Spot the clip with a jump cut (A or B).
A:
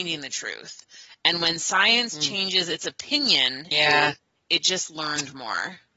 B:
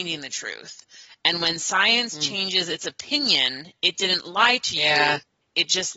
A